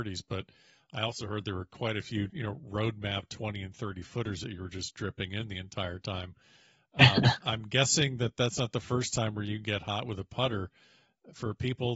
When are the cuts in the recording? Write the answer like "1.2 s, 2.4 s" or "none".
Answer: 2.3 s, 7.4 s